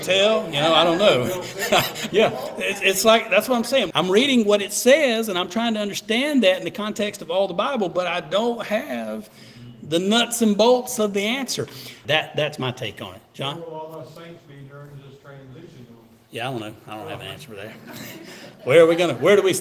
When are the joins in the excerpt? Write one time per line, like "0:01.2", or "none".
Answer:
0:02.1
0:03.9
0:12.0